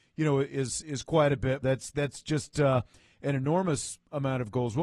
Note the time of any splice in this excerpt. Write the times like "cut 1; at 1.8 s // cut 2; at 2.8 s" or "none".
cut 1; at 1.6 s